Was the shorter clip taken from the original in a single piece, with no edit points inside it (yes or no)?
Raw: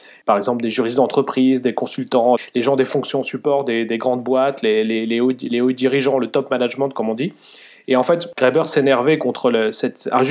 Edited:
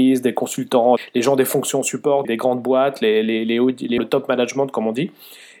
no